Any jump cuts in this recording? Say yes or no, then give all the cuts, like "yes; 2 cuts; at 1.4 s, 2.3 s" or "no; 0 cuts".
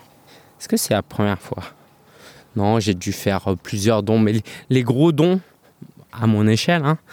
no; 0 cuts